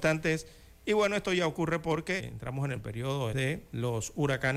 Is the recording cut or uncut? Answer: cut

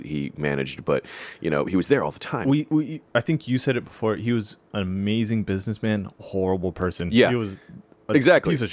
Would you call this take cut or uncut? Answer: uncut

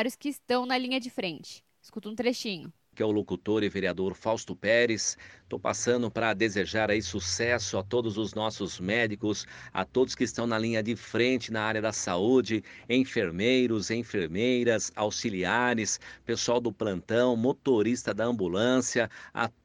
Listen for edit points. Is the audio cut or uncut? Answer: uncut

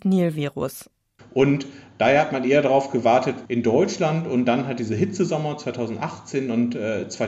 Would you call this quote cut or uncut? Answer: cut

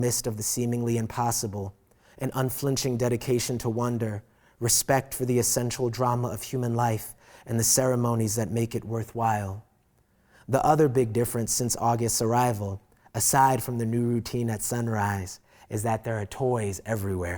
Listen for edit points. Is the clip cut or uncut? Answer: uncut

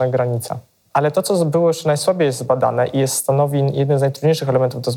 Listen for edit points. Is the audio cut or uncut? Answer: cut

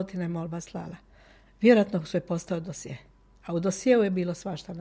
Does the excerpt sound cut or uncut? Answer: uncut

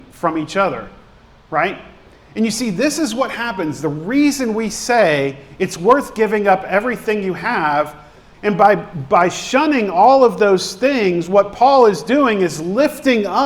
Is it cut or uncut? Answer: cut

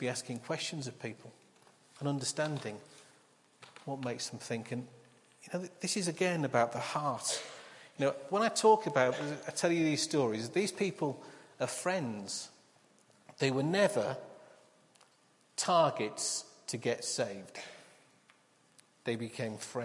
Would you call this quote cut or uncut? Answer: uncut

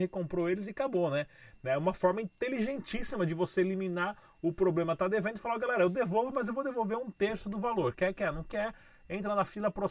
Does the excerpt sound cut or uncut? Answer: uncut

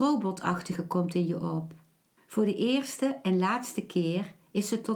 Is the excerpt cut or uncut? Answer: cut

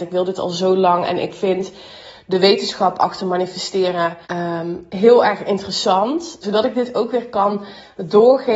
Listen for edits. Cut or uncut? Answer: cut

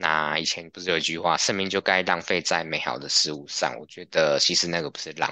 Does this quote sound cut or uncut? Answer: cut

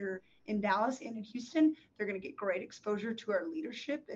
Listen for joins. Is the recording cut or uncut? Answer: uncut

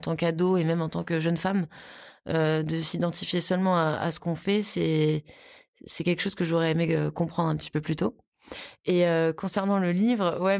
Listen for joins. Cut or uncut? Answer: uncut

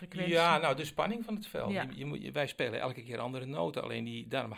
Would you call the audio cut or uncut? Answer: uncut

